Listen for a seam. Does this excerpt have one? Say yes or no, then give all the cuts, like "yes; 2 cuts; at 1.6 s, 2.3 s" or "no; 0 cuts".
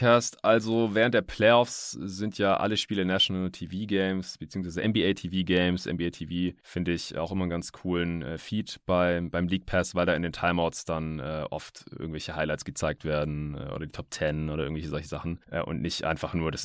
no; 0 cuts